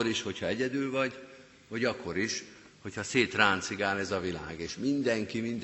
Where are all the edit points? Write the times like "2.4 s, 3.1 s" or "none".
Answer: none